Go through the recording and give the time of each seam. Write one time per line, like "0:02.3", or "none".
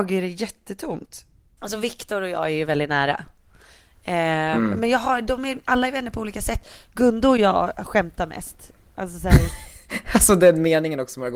0:01.6